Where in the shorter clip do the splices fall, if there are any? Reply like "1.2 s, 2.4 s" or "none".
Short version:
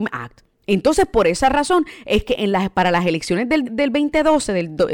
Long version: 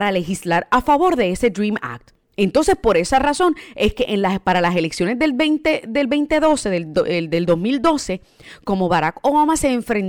3.6 s